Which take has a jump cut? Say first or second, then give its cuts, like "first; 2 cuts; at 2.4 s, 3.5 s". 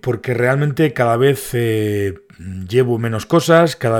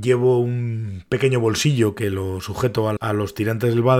second; 1 cut; at 3.0 s